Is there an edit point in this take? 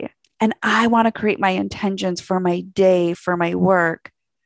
yes; 1 cut; at 3.1 s

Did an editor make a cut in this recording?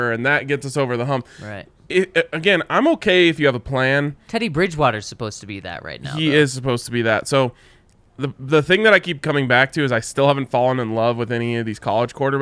no; 0 cuts

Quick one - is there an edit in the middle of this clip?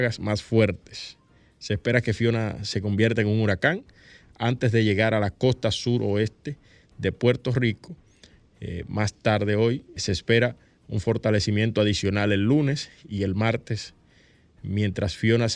yes; 2 cuts; at 10.0 s, 13.0 s

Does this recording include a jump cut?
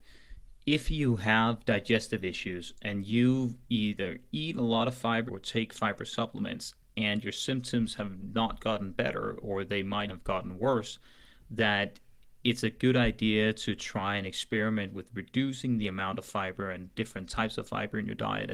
yes; 2 cuts; at 5.3 s, 10.1 s

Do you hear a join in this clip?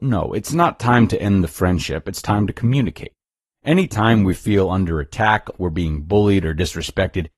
yes; 1 cut; at 5.5 s

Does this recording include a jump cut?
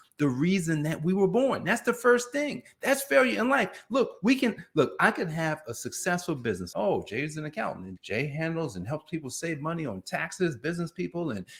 yes; 2 cuts; at 6.7 s, 8.0 s

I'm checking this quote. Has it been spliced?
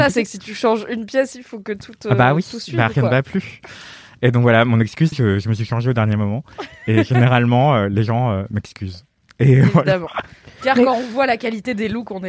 yes; 1 cut; at 5.1 s

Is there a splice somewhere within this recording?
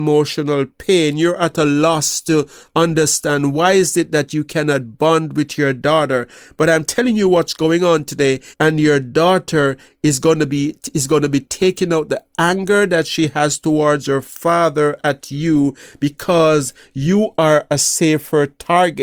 yes; 1 cut; at 8.5 s

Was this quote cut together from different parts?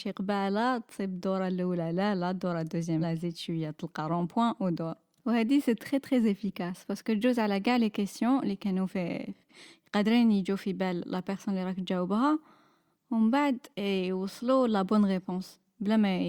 yes; 2 cuts; at 3.0 s, 13.7 s

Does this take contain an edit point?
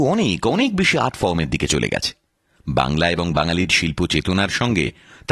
no; 0 cuts

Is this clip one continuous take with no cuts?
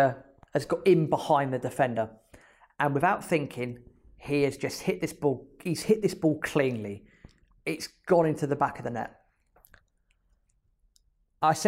yes; 0 cuts

